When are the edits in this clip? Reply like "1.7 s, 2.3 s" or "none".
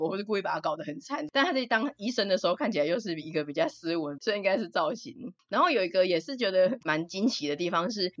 4.2 s